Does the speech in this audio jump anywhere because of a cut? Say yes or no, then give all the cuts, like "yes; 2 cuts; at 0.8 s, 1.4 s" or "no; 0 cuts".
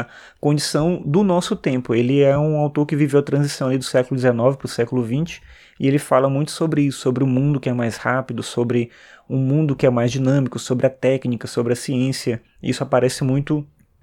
no; 0 cuts